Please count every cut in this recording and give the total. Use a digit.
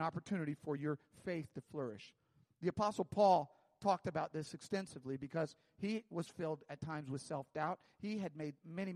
0